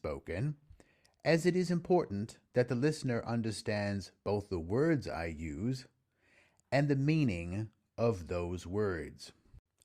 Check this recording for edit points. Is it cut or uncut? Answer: uncut